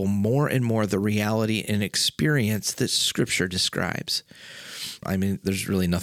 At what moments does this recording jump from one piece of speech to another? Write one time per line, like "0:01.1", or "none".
0:05.0